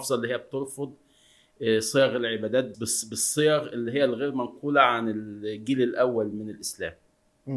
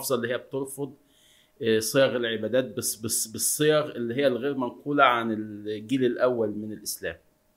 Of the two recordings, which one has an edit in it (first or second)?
first